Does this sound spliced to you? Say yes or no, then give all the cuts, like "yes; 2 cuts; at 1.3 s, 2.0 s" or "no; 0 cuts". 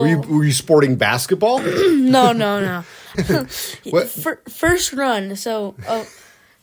yes; 1 cut; at 3.1 s